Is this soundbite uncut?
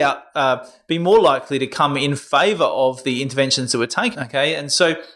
no; 1 cut; at 4.1 s

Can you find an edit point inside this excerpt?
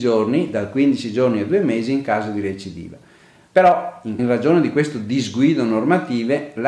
yes; 1 cut; at 4.2 s

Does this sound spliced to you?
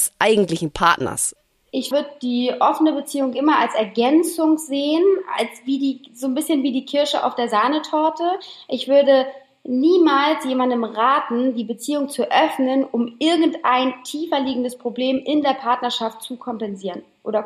no; 0 cuts

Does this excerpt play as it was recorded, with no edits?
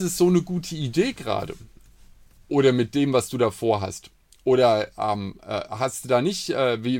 yes; 0 cuts

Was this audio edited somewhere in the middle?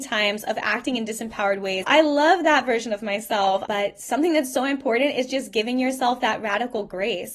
yes; 2 cuts; at 1.8 s, 3.7 s

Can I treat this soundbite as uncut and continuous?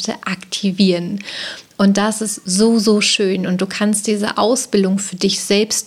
yes; 0 cuts

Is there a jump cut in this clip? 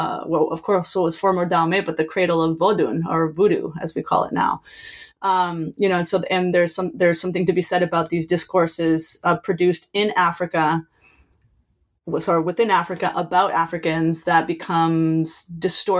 no; 0 cuts

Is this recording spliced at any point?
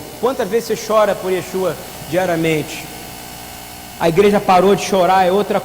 no; 0 cuts

